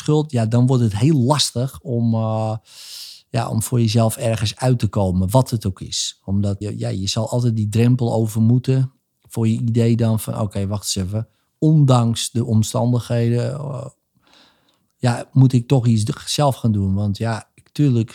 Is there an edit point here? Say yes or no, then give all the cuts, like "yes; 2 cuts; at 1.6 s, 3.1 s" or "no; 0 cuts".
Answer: yes; 1 cut; at 6.6 s